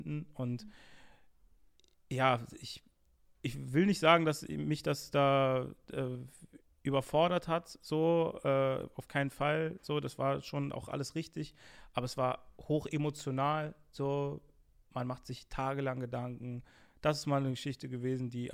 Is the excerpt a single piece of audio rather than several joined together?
yes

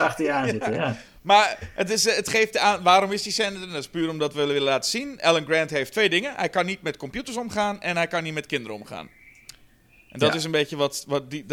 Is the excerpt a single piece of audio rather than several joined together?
yes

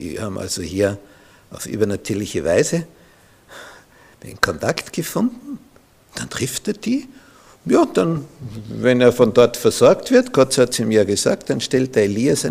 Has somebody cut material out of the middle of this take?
no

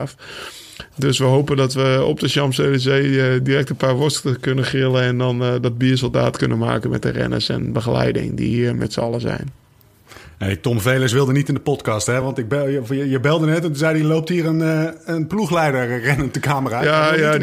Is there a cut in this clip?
no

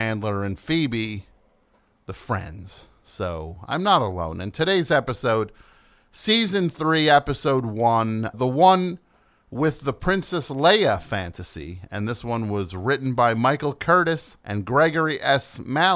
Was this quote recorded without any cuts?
no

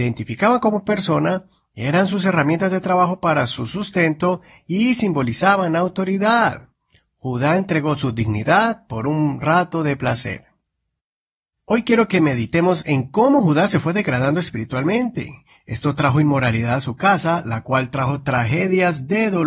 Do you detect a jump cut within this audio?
no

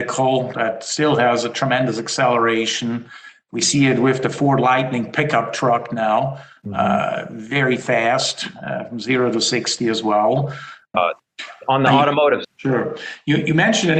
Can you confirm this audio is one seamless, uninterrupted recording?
no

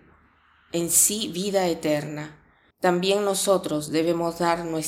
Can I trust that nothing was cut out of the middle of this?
no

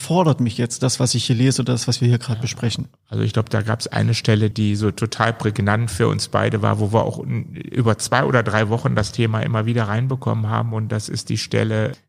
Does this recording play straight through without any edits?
no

